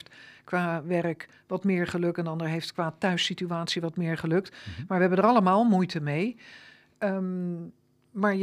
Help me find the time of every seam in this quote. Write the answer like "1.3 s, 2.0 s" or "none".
none